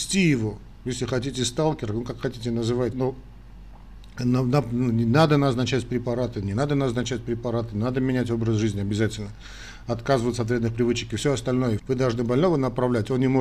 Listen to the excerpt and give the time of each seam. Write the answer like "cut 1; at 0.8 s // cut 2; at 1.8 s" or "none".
cut 1; at 2.9 s // cut 2; at 11.8 s